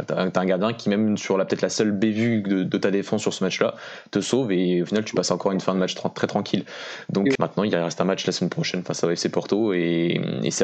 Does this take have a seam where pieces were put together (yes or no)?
yes